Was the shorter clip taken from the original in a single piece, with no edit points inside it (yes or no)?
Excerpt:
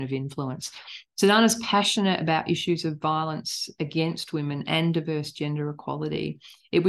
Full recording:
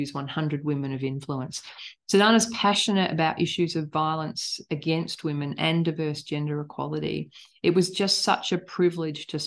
yes